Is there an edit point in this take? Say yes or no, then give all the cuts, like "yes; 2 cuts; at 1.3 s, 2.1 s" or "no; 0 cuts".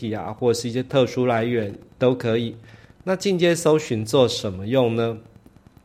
yes; 1 cut; at 2.8 s